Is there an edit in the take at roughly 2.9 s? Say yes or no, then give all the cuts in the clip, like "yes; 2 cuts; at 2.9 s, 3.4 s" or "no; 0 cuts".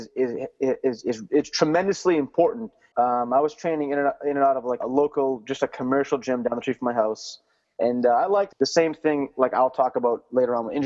yes; 3 cuts; at 2.9 s, 4.8 s, 8.5 s